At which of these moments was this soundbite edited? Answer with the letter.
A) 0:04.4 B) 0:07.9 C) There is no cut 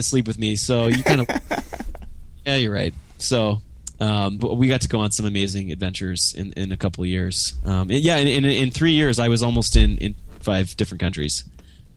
A